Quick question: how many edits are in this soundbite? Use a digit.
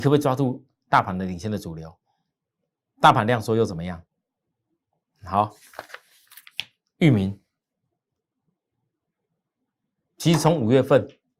0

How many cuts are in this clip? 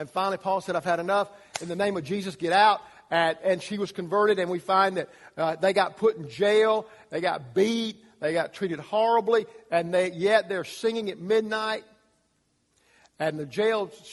0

